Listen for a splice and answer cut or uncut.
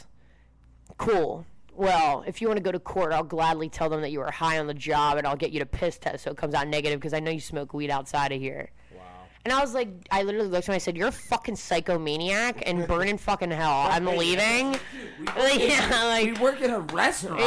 uncut